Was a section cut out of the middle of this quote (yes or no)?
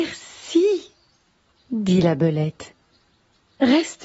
no